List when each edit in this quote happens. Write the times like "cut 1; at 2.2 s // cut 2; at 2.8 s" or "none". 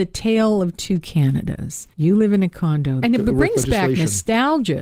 cut 1; at 1.9 s // cut 2; at 3.0 s